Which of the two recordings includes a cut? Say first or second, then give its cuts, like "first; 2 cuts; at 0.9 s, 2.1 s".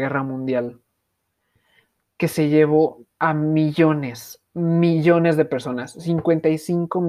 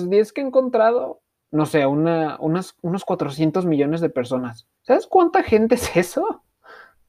second; 2 cuts; at 1.4 s, 4.8 s